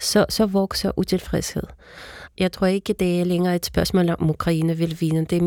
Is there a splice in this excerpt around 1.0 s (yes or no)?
no